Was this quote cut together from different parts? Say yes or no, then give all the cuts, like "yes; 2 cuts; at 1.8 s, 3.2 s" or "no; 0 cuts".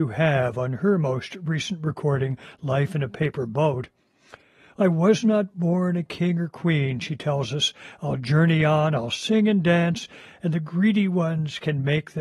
no; 0 cuts